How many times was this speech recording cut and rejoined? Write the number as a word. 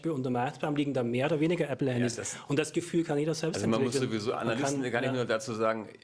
zero